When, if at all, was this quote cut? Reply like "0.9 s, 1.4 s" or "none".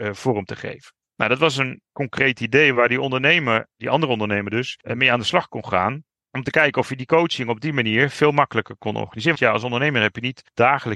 1.8 s, 9.3 s